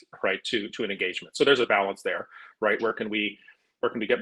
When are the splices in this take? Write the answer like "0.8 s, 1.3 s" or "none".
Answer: 2.8 s